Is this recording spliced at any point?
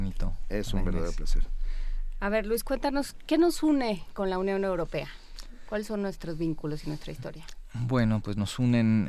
no; 0 cuts

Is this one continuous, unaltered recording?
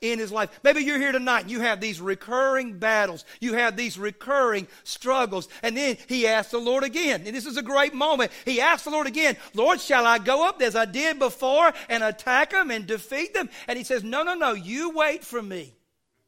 no; 1 cut; at 8.4 s

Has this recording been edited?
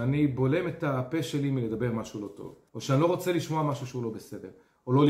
yes; 1 cut; at 2.7 s

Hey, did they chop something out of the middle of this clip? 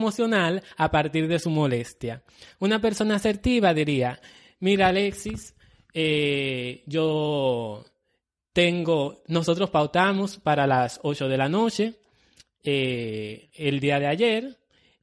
yes; 1 cut; at 13.5 s

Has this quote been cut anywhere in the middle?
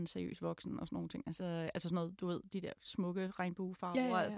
yes; 1 cut; at 1.4 s

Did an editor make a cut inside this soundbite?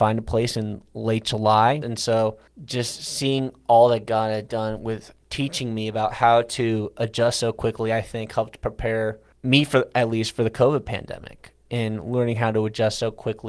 yes; 1 cut; at 1.8 s

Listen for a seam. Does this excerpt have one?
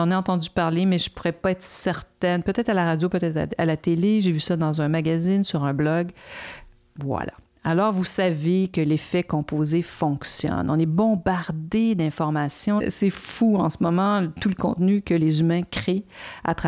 no; 0 cuts

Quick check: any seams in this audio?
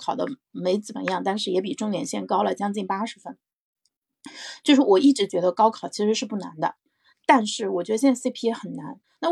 no; 0 cuts

